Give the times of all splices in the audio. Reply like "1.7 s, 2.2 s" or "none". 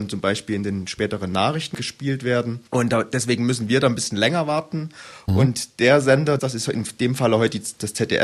2.7 s, 5.3 s, 6.4 s